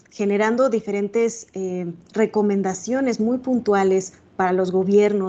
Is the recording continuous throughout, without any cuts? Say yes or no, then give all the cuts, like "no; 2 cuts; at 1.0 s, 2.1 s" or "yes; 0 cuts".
yes; 0 cuts